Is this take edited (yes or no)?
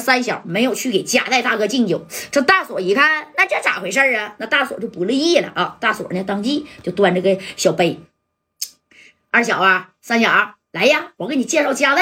no